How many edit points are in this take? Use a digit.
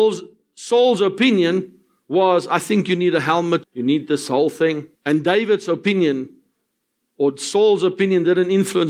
2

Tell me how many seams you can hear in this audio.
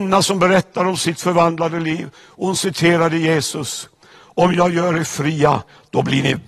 0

